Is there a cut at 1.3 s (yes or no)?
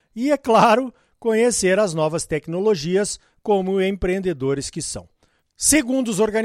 no